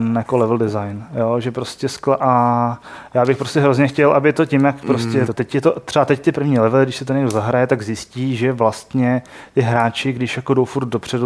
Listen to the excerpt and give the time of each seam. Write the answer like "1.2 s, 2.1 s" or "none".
5.2 s